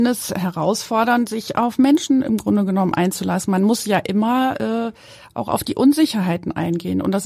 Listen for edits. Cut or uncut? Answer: uncut